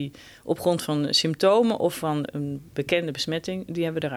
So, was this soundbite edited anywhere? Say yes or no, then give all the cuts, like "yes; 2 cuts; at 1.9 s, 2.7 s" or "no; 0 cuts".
yes; 1 cut; at 2.3 s